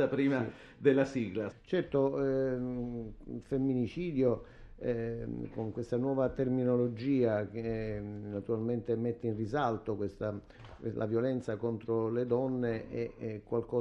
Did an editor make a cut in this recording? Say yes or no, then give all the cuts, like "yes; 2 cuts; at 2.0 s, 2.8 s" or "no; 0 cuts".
yes; 1 cut; at 1.5 s